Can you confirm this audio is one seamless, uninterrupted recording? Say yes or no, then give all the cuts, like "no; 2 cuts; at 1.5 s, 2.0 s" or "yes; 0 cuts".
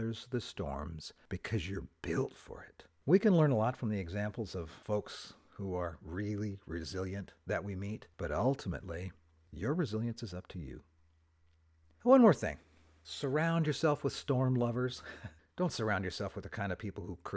yes; 0 cuts